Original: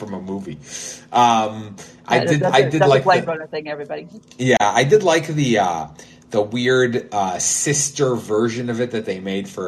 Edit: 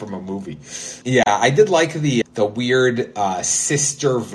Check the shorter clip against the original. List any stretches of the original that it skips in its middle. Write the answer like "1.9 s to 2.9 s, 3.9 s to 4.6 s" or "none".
1.0 s to 4.4 s, 5.6 s to 6.2 s